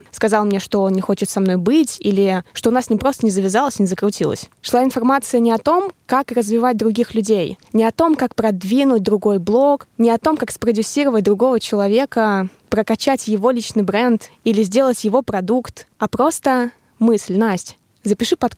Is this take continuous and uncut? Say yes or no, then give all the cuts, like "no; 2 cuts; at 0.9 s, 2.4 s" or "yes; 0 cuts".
yes; 0 cuts